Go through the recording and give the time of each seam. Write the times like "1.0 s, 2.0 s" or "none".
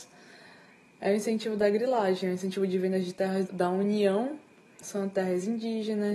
3.5 s, 4.8 s